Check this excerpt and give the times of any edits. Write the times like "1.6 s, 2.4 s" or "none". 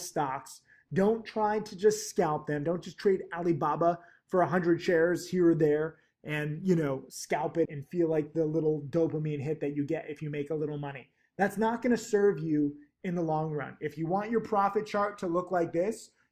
7.7 s